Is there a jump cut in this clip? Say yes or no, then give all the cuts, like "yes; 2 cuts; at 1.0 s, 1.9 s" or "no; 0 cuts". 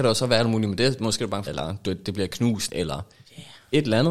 yes; 2 cuts; at 1.5 s, 2.7 s